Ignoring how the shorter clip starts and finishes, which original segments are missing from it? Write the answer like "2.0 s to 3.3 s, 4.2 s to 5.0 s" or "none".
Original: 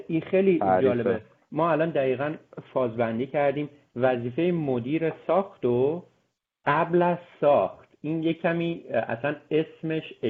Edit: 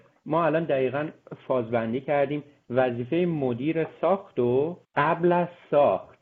6.1 s to 6.5 s